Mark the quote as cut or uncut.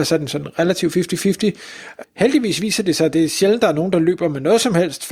cut